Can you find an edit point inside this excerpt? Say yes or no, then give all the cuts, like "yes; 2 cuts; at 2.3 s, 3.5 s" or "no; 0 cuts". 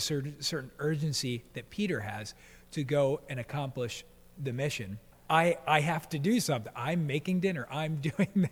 yes; 1 cut; at 5.1 s